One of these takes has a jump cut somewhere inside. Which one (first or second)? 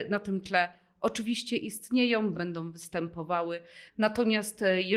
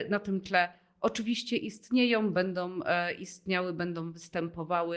first